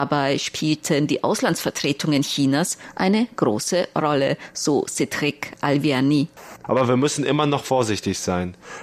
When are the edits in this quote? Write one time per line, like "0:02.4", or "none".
0:06.6